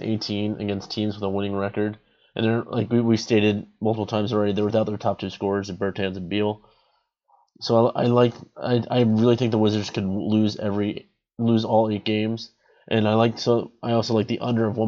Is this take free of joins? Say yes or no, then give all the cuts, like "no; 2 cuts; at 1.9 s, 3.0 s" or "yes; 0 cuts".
yes; 0 cuts